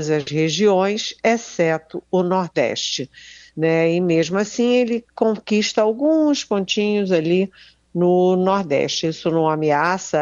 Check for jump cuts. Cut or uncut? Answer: uncut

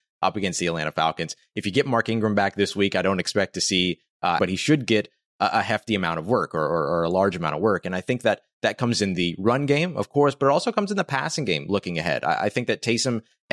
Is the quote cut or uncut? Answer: cut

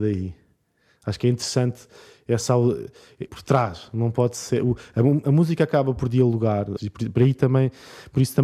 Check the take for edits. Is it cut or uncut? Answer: cut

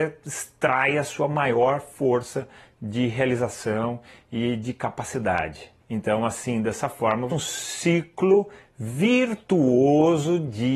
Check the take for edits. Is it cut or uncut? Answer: cut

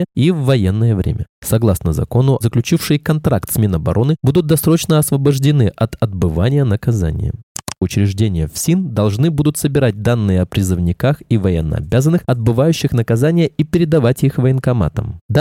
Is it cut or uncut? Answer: cut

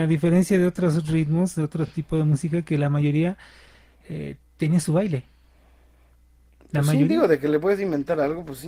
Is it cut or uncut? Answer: uncut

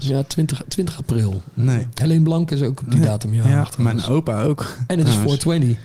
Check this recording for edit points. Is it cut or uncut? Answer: uncut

